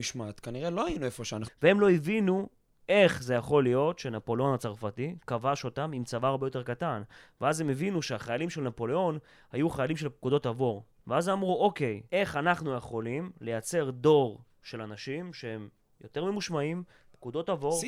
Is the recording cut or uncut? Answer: cut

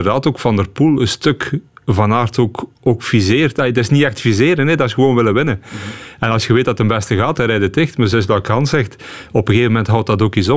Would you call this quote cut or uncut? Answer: cut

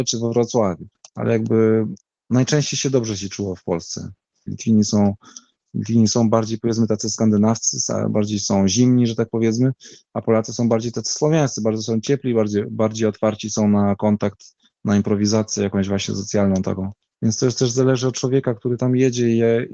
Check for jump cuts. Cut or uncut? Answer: cut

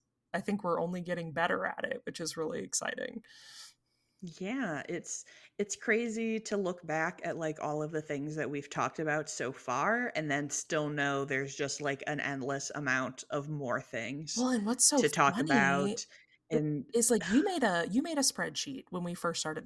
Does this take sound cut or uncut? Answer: uncut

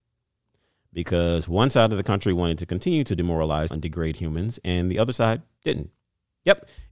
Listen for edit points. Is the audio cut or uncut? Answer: cut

